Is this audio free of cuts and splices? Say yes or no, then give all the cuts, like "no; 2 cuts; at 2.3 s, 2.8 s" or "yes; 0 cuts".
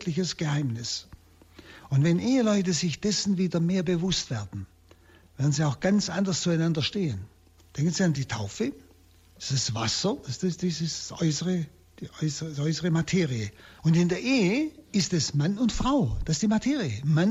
no; 2 cuts; at 7.6 s, 13.8 s